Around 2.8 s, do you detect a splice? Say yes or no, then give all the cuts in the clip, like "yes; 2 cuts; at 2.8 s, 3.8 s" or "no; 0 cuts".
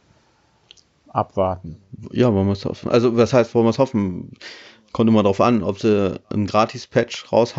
no; 0 cuts